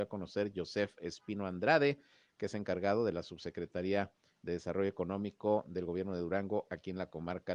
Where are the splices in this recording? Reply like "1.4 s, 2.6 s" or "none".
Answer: none